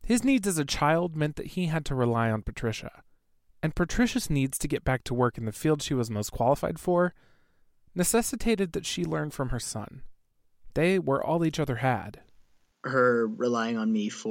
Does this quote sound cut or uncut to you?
uncut